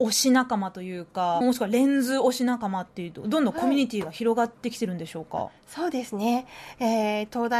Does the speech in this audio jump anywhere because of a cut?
yes; 1 cut; at 1.4 s

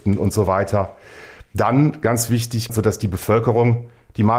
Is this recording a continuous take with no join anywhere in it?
no; 1 cut; at 2.7 s

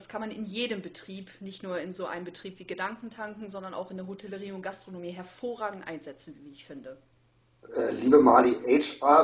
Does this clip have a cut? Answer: no; 0 cuts

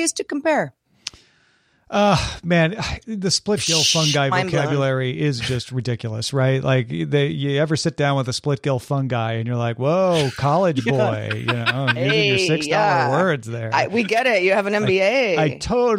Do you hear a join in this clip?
no; 0 cuts

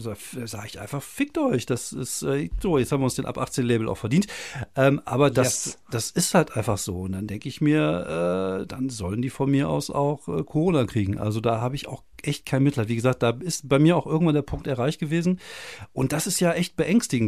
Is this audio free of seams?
yes; 0 cuts

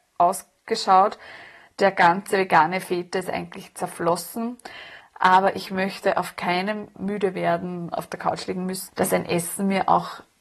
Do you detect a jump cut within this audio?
yes; 3 cuts; at 5.0 s, 7.0 s, 8.9 s

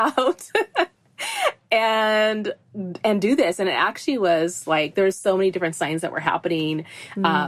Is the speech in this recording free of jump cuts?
yes; 0 cuts

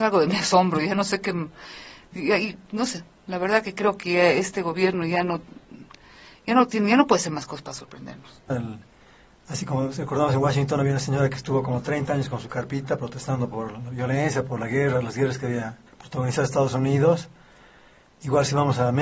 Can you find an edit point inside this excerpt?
yes; 2 cuts; at 8.5 s, 15.9 s

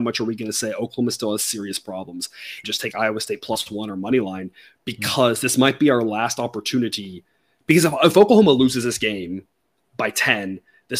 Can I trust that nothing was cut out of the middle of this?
no; 1 cut; at 2.6 s

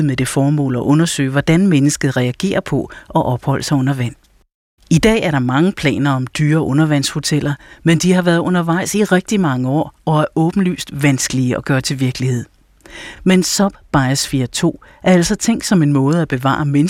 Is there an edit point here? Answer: no; 0 cuts

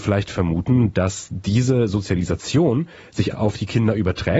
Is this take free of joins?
no; 1 cut; at 3.3 s

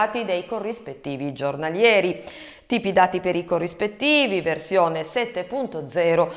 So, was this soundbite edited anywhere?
no; 0 cuts

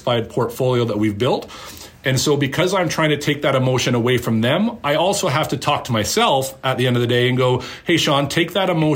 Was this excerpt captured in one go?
yes; 0 cuts

